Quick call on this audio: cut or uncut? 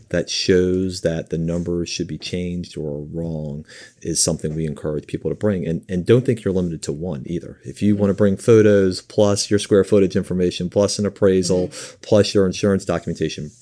uncut